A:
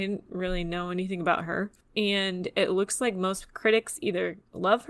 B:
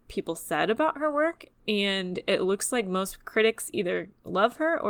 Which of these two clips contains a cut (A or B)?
A